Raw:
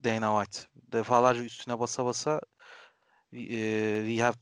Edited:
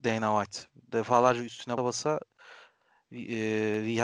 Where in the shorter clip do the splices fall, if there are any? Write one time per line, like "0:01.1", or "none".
0:01.8